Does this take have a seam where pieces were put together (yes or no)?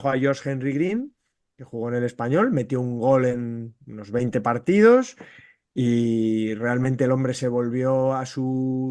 no